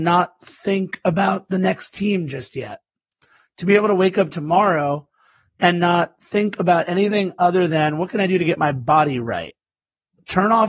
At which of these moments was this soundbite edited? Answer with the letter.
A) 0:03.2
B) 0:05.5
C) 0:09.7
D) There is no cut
D